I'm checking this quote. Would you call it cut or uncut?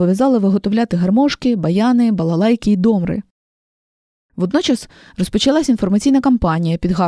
uncut